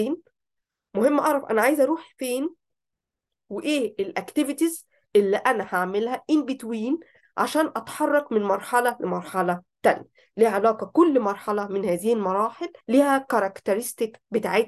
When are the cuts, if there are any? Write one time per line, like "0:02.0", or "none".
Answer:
0:12.8